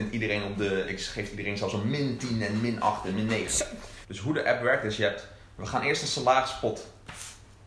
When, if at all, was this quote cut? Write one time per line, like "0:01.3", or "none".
0:04.0